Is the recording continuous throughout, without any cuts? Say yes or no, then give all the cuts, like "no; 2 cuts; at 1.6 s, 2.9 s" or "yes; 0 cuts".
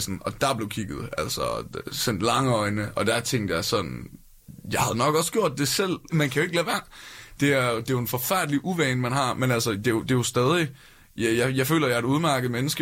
no; 1 cut; at 6.1 s